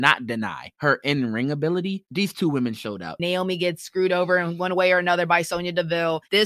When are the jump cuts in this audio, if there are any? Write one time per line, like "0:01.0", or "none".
0:03.2